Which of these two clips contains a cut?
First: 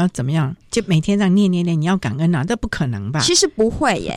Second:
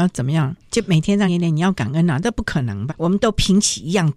second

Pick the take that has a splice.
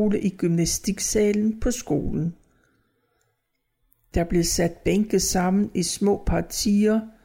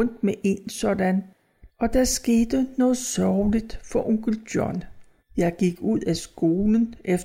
second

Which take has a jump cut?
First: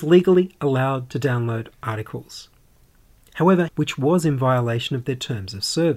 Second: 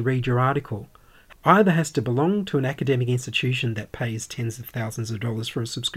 first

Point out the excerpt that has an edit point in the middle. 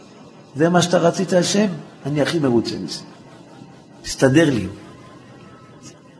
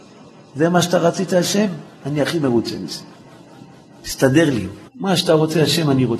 second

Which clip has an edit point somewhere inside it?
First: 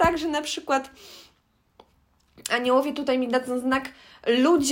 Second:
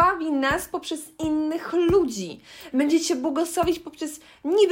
second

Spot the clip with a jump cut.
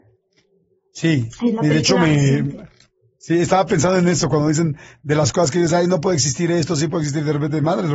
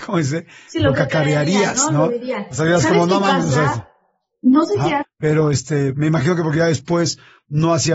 second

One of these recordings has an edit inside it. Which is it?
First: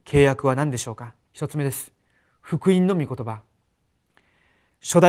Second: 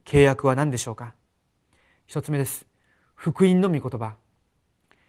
first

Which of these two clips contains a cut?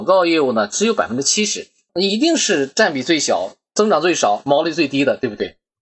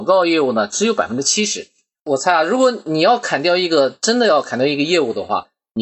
first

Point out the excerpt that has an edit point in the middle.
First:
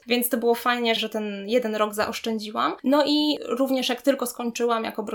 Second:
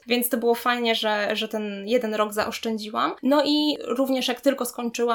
first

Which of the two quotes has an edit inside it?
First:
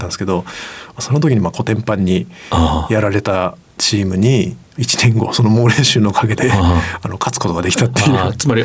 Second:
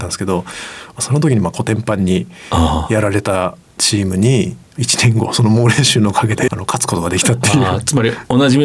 second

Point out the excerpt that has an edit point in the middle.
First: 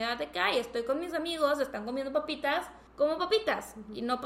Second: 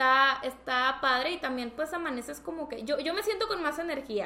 first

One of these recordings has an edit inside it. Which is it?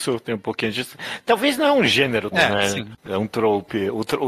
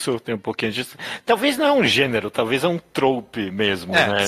first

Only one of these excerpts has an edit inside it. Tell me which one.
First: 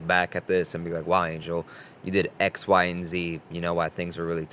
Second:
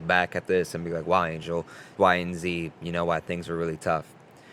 second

